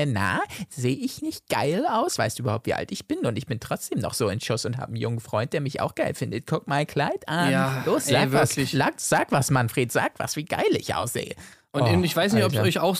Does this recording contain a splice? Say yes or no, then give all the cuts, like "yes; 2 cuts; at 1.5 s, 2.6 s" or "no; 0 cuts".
no; 0 cuts